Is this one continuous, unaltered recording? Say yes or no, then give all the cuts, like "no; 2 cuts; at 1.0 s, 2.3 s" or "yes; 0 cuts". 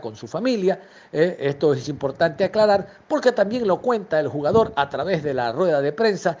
yes; 0 cuts